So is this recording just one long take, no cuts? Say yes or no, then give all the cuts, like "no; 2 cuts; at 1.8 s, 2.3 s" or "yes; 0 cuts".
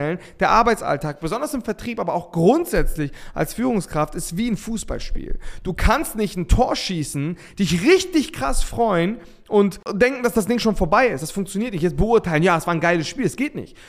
yes; 0 cuts